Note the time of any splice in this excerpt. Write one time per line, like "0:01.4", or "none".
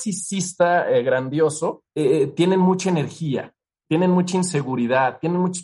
0:01.9